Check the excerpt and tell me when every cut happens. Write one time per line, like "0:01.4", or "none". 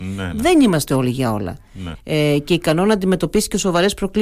0:02.0